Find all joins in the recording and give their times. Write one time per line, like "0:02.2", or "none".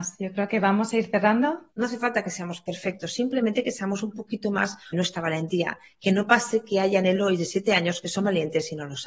0:01.7
0:04.9